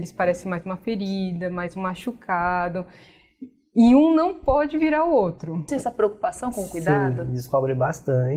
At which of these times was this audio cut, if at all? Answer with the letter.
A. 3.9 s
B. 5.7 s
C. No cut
B